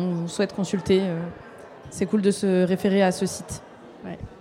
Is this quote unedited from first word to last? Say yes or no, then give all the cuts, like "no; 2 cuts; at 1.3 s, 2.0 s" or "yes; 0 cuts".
yes; 0 cuts